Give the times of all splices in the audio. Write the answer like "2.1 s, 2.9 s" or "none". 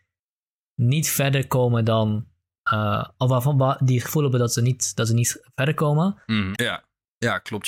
6.5 s